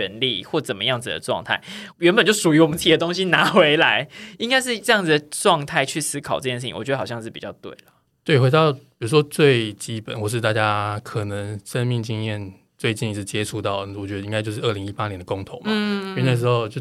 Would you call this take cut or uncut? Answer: cut